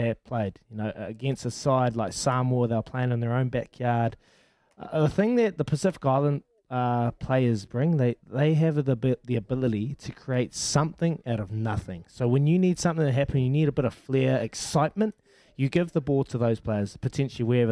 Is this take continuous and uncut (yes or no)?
yes